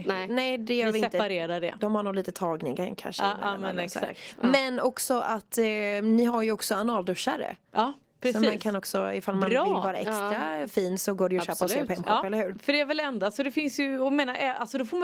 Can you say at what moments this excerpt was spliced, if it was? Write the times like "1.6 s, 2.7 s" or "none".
none